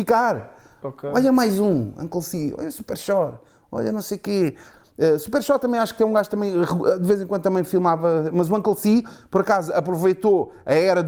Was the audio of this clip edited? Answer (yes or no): no